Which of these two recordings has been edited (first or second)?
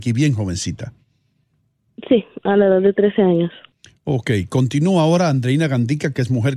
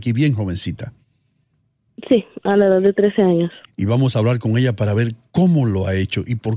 second